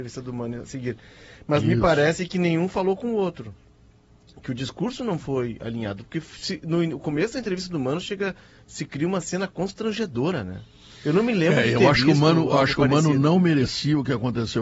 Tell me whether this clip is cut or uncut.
uncut